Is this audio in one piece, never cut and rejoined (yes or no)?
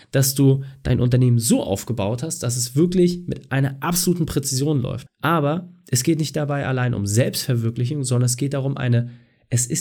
no